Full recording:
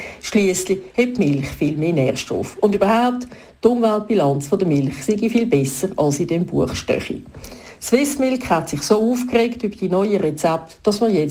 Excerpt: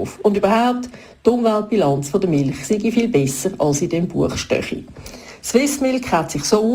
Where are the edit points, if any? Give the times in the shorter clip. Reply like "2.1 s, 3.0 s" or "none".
none